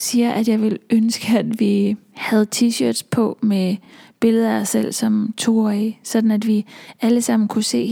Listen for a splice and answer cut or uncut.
uncut